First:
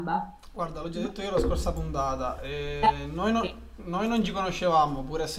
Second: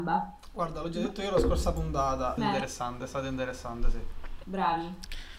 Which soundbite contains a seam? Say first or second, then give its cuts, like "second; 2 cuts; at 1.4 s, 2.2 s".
second; 2 cuts; at 2.4 s, 4.4 s